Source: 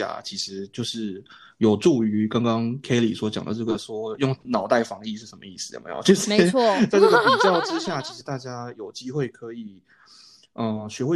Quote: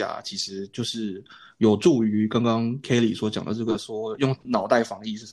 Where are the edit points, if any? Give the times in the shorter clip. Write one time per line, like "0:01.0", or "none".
none